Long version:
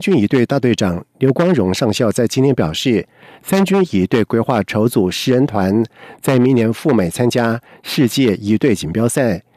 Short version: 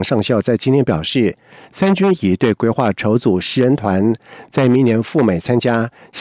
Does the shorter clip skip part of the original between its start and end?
no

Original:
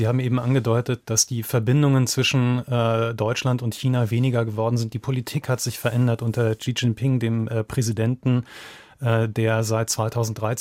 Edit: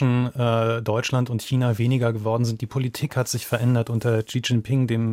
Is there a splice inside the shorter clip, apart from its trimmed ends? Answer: no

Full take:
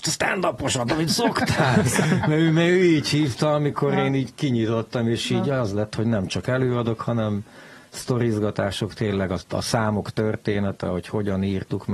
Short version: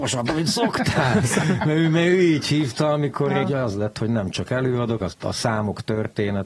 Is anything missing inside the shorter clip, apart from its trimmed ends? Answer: yes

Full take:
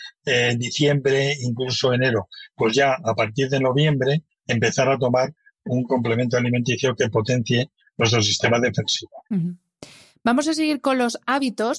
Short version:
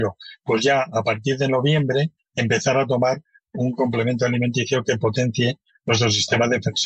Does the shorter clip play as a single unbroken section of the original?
yes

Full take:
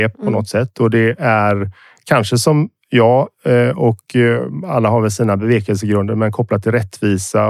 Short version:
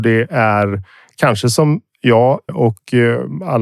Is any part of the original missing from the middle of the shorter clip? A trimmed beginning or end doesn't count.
yes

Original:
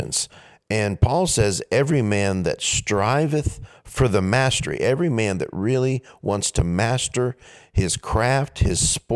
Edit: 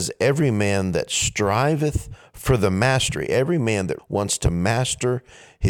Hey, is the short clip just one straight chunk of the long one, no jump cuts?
no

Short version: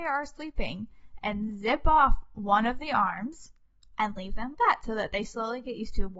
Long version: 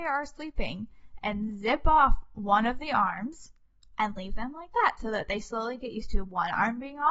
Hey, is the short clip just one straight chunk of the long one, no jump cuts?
no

